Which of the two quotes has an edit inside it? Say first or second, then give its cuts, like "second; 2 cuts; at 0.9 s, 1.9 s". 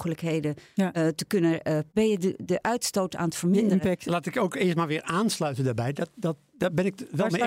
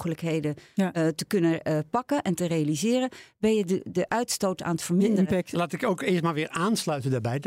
first; 1 cut; at 1.9 s